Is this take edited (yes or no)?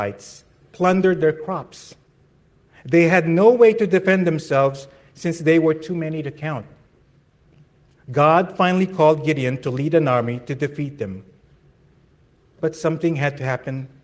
no